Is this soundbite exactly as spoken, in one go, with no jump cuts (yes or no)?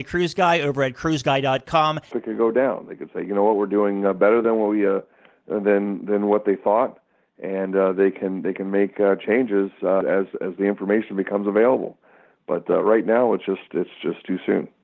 no